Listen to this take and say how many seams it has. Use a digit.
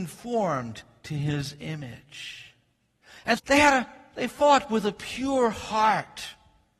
1